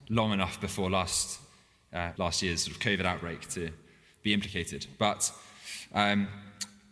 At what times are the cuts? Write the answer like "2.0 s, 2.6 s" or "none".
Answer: 2.2 s